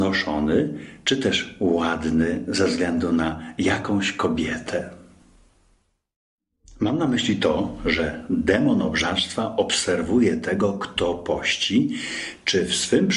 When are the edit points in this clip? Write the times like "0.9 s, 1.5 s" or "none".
none